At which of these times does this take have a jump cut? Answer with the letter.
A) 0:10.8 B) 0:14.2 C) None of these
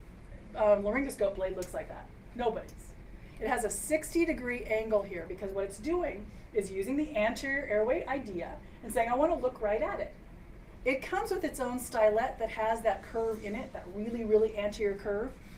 A